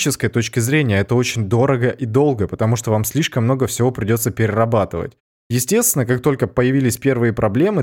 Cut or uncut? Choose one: uncut